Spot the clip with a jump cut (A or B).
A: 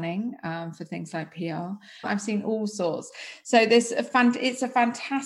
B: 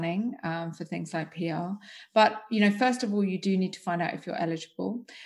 A